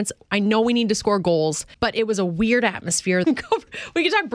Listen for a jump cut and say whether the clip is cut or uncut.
cut